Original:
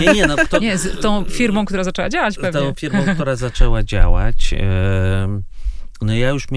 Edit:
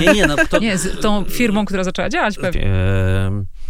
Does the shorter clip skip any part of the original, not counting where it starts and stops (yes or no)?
yes